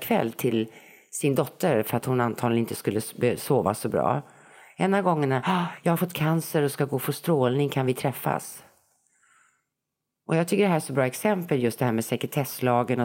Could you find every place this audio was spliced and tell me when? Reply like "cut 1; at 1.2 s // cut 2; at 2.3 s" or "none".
none